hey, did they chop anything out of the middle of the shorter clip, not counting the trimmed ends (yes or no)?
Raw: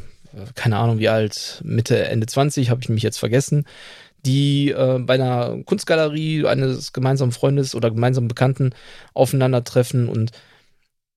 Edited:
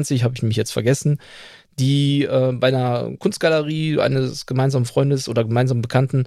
no